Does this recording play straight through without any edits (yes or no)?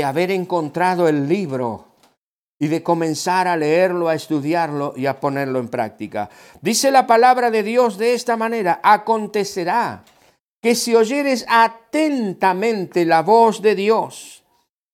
yes